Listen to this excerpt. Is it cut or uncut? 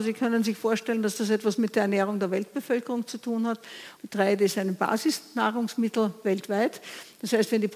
cut